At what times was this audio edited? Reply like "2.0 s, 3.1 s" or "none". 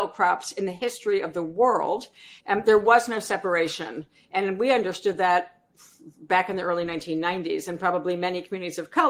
2.4 s